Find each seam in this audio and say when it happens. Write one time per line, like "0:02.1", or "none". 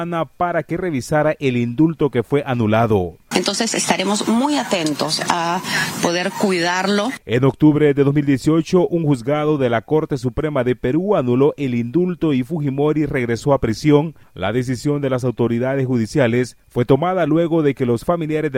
0:03.3